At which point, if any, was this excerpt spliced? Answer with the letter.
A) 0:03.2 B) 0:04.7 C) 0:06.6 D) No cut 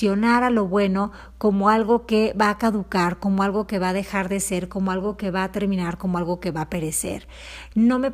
D